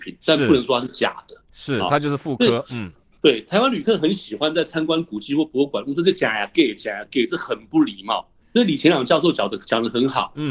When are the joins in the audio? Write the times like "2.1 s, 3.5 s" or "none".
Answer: 8.4 s